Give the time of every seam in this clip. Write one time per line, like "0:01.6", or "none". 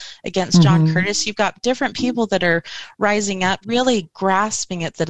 0:03.6